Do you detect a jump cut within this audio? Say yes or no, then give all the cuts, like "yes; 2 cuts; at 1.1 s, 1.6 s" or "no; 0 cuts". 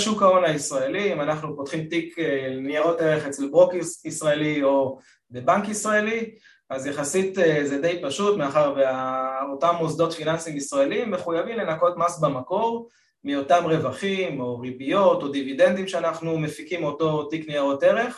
no; 0 cuts